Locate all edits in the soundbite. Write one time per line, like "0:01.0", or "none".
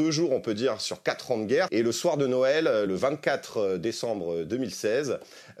0:01.7
0:02.9